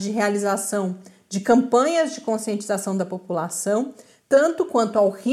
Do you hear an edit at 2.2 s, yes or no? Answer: no